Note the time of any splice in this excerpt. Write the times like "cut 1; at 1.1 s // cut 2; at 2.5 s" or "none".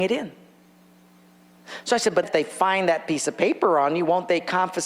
cut 1; at 2.2 s